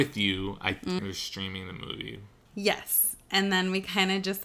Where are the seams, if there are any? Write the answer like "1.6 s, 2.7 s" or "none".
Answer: 1.0 s, 2.5 s

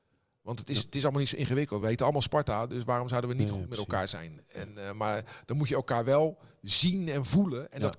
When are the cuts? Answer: none

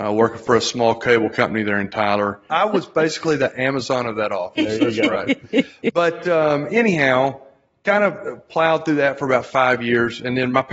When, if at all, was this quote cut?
2.5 s

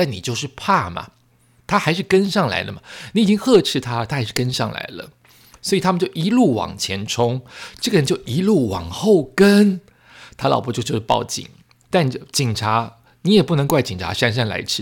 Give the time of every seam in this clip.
none

